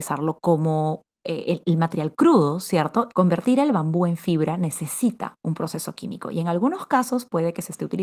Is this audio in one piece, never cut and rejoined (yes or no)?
no